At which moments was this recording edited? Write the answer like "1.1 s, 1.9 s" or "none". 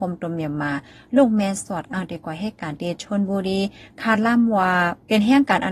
none